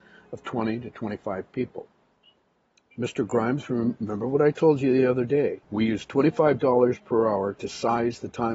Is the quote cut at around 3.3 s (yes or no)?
no